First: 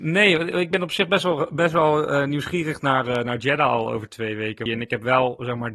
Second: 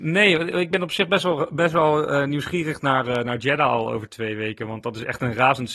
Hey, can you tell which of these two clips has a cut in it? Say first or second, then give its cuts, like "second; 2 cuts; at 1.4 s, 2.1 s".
first; 1 cut; at 4.7 s